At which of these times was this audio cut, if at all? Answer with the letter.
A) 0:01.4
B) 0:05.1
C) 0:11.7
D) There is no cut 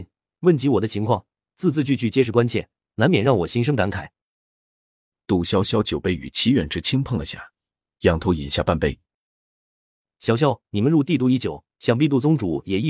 C